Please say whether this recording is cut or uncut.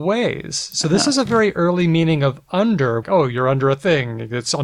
cut